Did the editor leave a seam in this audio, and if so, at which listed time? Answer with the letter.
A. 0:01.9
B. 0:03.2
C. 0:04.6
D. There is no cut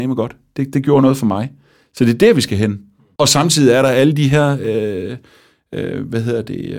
B